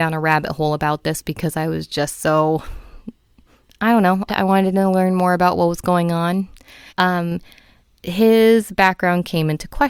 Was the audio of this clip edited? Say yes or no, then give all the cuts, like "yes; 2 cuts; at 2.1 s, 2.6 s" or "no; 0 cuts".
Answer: yes; 2 cuts; at 4.3 s, 6.9 s